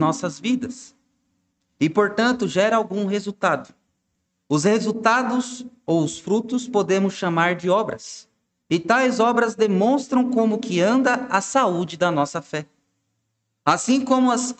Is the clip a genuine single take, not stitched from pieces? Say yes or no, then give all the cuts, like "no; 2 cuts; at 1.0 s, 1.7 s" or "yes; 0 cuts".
yes; 0 cuts